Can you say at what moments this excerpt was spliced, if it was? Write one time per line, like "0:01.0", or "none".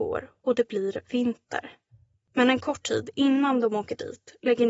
0:02.1